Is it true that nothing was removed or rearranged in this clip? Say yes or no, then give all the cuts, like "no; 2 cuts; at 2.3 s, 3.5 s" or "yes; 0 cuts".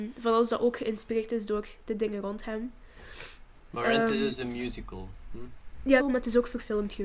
no; 1 cut; at 6.0 s